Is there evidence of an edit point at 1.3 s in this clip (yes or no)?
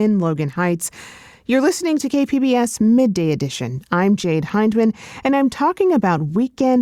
no